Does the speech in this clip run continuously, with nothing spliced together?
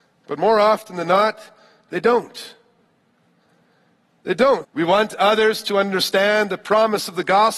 no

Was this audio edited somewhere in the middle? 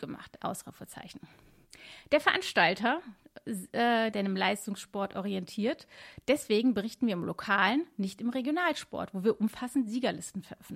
yes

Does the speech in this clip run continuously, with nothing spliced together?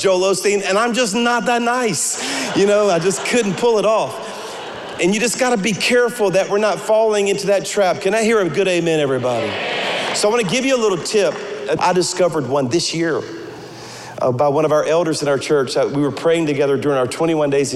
no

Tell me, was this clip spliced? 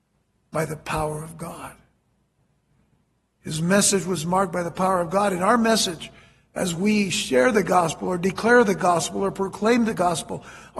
no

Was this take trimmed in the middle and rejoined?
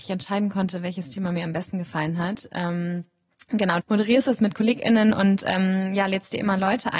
yes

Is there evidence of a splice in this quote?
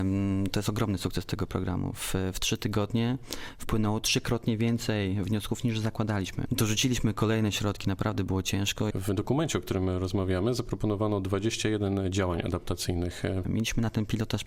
yes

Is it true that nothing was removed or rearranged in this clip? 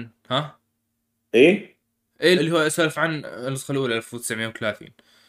no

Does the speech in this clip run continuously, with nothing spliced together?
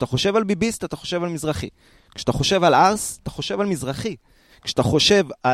yes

